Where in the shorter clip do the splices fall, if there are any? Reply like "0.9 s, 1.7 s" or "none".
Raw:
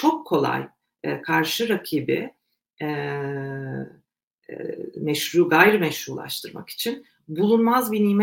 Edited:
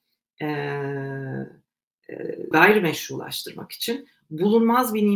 2.5 s

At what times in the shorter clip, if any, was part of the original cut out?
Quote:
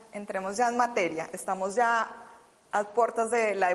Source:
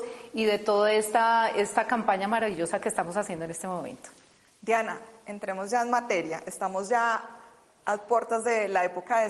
none

